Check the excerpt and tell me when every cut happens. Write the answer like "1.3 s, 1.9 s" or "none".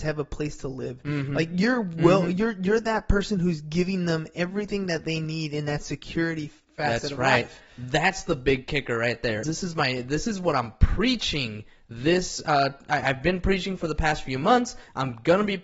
9.4 s